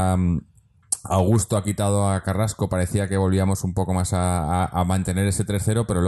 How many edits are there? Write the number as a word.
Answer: zero